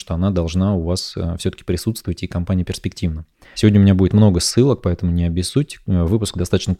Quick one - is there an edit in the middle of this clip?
yes; 1 cut; at 3.5 s

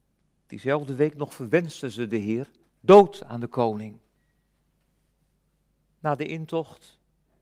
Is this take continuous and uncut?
no; 1 cut; at 2.7 s

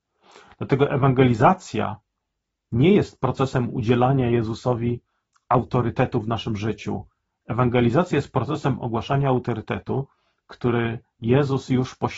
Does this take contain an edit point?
yes; 1 cut; at 7.4 s

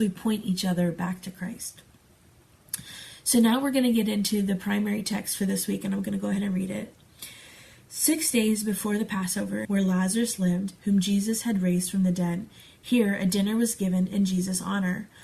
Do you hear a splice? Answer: yes; 1 cut; at 9.6 s

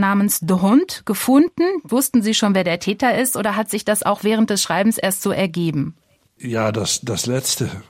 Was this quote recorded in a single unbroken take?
no; 1 cut; at 1.9 s

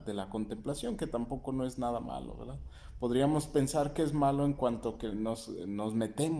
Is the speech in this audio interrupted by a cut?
yes; 1 cut; at 5.1 s

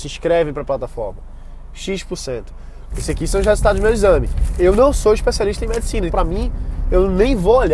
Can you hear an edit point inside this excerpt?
yes; 2 cuts; at 2.9 s, 6.1 s

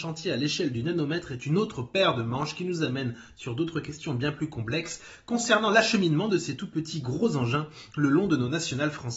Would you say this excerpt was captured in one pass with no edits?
yes; 0 cuts

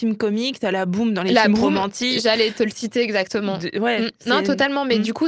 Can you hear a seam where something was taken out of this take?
no; 0 cuts

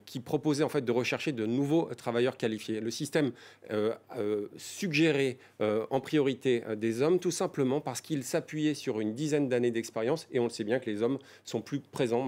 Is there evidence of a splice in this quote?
no; 0 cuts

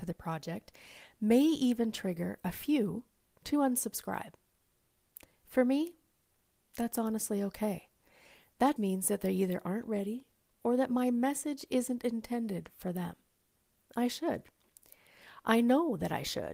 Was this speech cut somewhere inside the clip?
yes; 2 cuts; at 8.8 s, 13.8 s

